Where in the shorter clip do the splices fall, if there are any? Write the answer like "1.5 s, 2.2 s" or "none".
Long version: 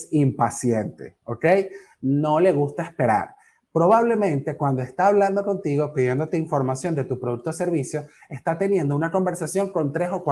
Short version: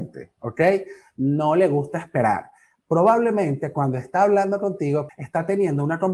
5.1 s